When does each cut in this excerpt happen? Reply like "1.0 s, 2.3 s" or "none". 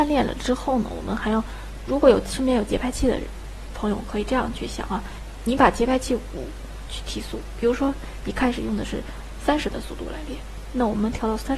1.9 s, 6.9 s